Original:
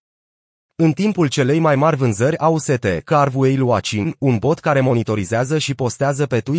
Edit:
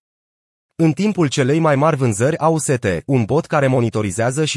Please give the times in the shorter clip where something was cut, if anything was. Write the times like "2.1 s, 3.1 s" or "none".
3.0 s